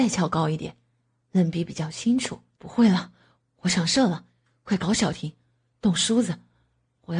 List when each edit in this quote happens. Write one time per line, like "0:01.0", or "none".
0:02.6